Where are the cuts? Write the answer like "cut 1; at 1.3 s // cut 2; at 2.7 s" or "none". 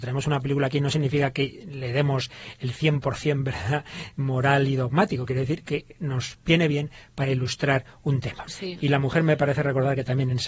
cut 1; at 8.5 s